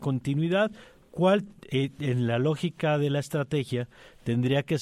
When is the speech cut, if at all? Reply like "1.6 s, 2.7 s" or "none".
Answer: none